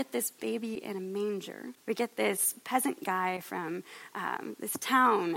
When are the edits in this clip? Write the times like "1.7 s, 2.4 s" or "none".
1.8 s